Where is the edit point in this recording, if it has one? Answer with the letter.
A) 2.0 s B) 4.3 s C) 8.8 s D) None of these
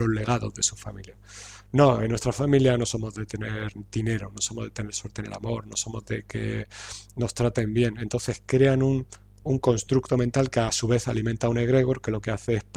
D